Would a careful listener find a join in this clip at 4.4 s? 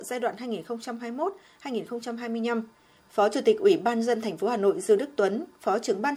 no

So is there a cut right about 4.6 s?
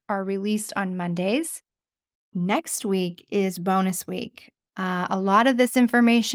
yes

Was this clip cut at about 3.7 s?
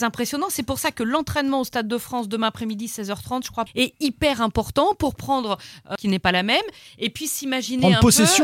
yes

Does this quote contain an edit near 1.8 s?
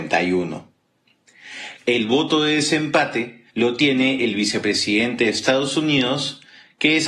yes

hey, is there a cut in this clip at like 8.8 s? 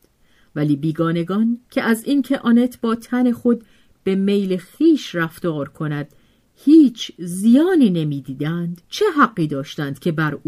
yes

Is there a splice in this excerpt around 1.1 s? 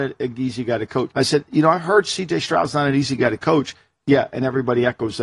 yes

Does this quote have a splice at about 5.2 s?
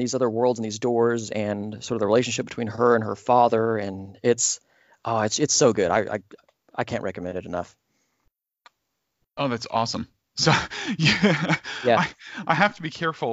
no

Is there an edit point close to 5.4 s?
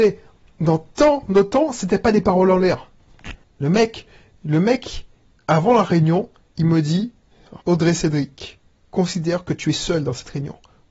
no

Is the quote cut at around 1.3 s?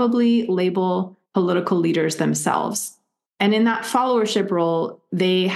yes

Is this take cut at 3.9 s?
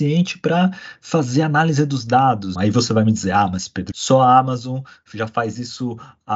yes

